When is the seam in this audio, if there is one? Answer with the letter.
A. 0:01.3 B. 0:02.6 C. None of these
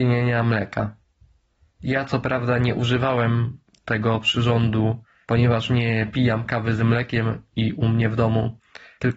C